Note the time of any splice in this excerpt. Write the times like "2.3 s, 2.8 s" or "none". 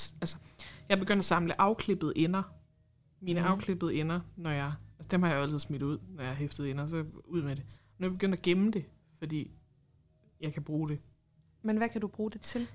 none